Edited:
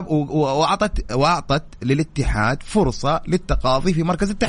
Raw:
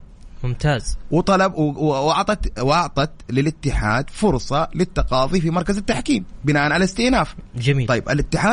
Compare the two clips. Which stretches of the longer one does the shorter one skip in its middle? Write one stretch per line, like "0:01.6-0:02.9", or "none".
none